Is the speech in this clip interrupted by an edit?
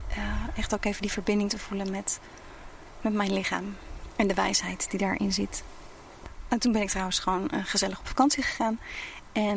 no; 0 cuts

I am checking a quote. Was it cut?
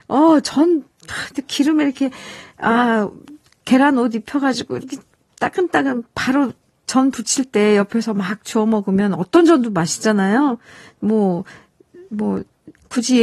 no; 0 cuts

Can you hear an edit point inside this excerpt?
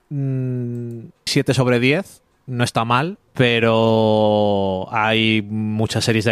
yes; 2 cuts; at 1.3 s, 3.3 s

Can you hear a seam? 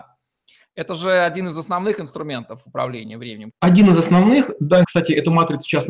yes; 2 cuts; at 3.5 s, 4.8 s

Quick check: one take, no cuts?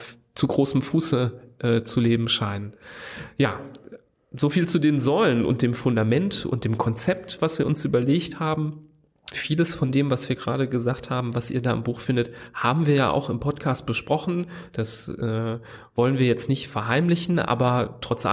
no; 1 cut; at 9.3 s

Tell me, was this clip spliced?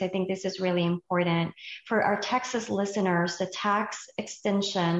no; 0 cuts

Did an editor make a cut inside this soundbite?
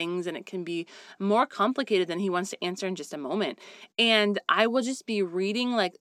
yes; 1 cut; at 3.9 s

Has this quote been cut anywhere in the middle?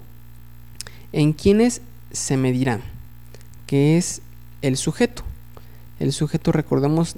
no; 0 cuts

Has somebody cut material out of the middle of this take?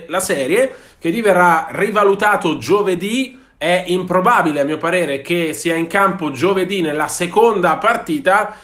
no; 0 cuts

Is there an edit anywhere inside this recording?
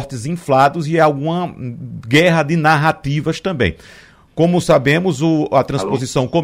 no; 0 cuts

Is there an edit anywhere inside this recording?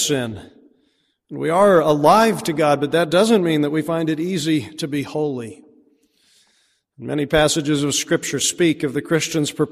no; 0 cuts

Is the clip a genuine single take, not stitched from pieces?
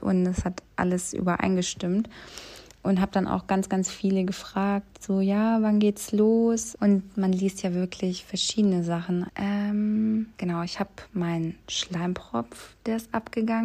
no; 3 cuts; at 6.7 s, 9.3 s, 10.3 s

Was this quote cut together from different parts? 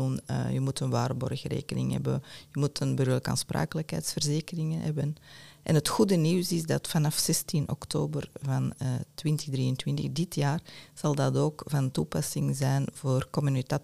no; 0 cuts

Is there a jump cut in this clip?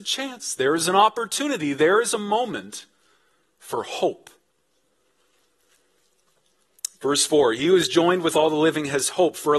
no; 0 cuts

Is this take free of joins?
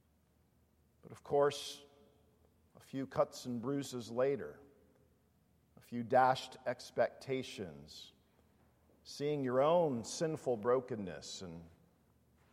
yes; 0 cuts

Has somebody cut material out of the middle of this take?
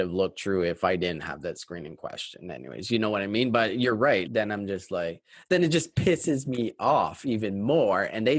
yes; 1 cut; at 4.3 s

